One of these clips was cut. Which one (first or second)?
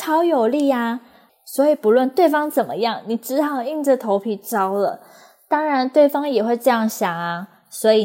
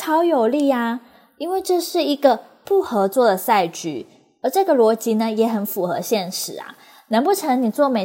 first